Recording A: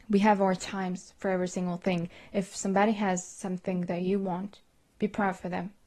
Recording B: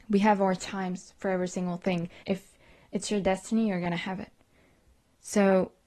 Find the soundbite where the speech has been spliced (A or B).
B